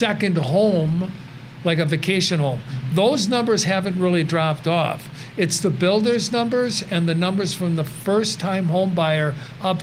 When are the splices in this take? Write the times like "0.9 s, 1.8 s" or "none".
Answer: none